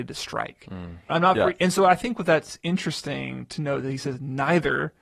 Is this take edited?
yes; 1 cut; at 1.1 s

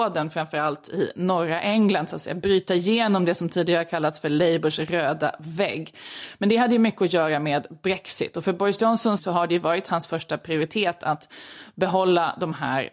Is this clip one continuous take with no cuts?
no; 1 cut; at 9.2 s

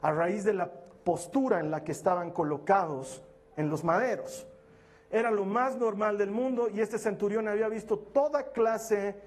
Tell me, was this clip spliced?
no; 0 cuts

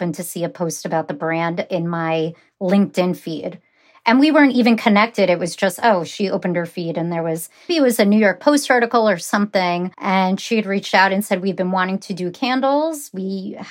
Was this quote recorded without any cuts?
no; 2 cuts; at 7.7 s, 9.9 s

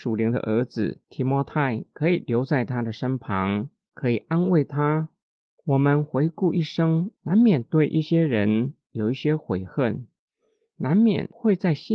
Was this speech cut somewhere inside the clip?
yes; 1 cut; at 5.6 s

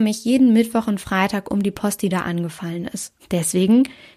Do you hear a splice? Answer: yes; 1 cut; at 3.2 s

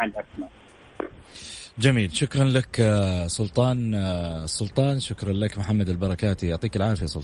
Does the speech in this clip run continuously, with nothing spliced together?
yes; 0 cuts

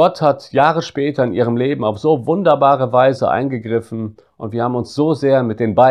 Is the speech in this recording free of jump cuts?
yes; 0 cuts

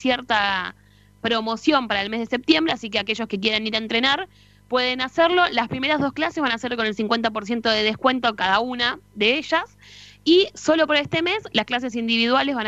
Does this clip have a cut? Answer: no; 0 cuts

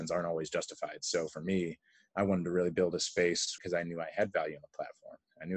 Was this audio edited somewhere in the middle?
yes; 1 cut; at 3.6 s

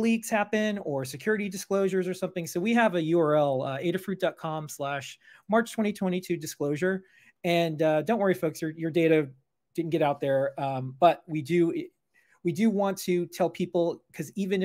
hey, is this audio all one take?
yes; 0 cuts

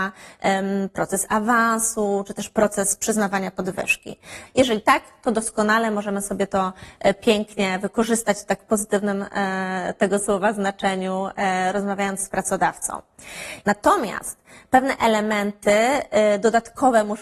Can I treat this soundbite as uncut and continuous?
no; 2 cuts; at 4.5 s, 13.6 s

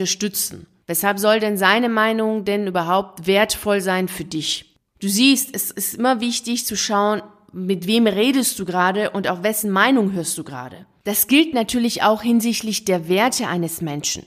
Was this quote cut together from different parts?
yes; 1 cut; at 4.9 s

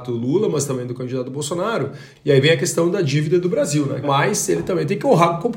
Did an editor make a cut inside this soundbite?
yes; 2 cuts; at 2.1 s, 4.0 s

